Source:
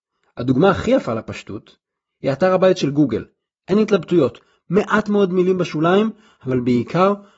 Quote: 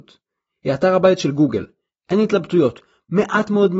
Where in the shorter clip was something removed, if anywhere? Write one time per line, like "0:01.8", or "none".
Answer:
none